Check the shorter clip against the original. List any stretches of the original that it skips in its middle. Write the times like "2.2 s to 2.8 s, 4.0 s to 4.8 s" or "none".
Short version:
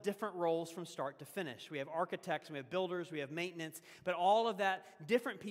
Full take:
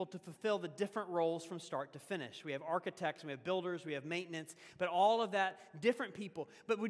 none